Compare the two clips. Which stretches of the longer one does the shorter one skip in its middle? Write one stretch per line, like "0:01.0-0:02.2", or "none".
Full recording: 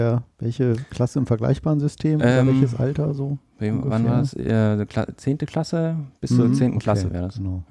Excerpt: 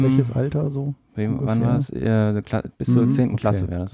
0:05.1-0:06.1